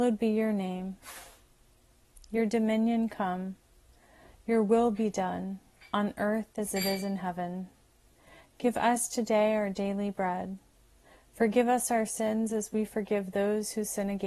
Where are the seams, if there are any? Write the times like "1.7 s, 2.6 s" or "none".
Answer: none

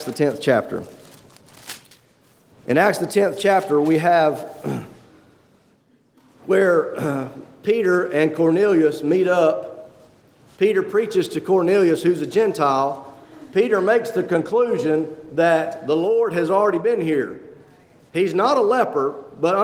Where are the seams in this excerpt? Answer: none

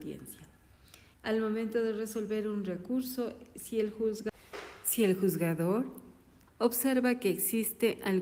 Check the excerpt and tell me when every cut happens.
1.1 s, 6.5 s

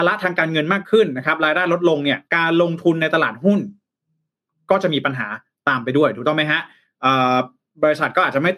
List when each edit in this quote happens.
2.3 s

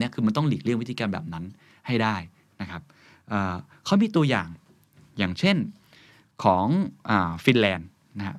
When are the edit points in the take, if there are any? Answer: none

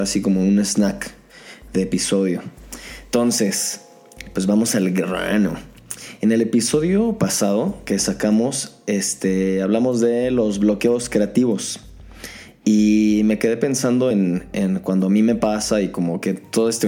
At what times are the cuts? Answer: none

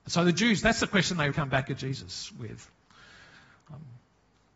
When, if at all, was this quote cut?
1.3 s

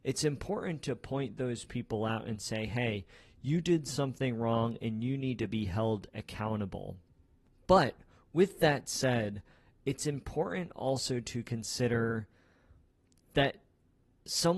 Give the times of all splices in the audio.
none

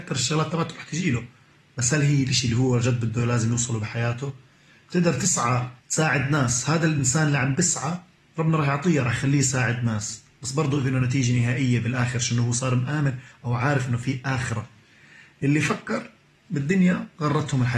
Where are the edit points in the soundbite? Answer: 5.8 s

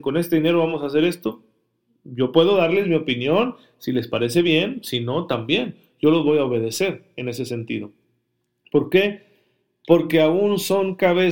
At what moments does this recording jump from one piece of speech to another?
none

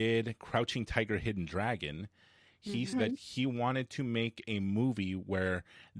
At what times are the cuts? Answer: 2.9 s

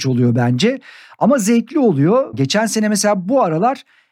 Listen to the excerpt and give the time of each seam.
2.3 s

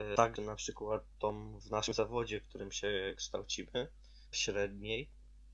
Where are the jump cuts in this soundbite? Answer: 1.6 s, 4.3 s

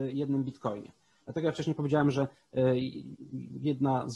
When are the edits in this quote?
none

